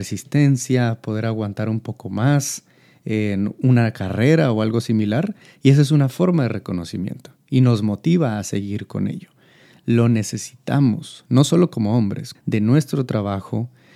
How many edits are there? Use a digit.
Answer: 1